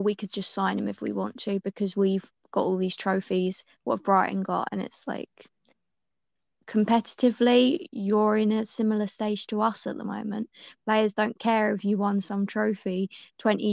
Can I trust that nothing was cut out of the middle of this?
yes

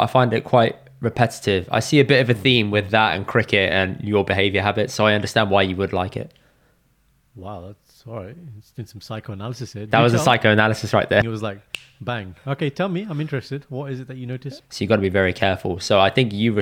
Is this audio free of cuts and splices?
no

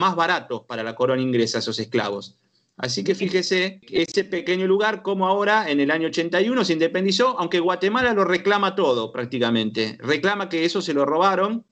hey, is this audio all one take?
yes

